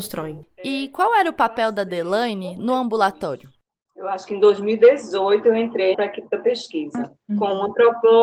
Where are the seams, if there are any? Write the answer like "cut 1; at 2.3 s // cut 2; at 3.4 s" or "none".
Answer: cut 1; at 5.9 s